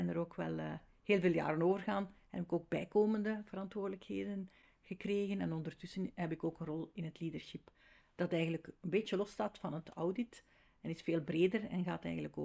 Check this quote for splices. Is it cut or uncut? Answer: uncut